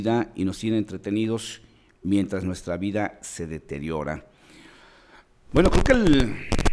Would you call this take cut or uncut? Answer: uncut